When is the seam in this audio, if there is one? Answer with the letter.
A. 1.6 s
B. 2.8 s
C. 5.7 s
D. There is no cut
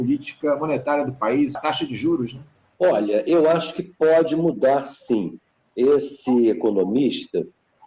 A